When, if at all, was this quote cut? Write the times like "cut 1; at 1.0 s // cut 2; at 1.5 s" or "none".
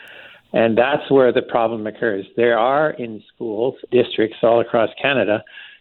cut 1; at 3.9 s